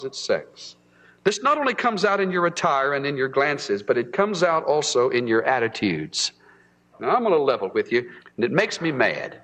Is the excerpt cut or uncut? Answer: cut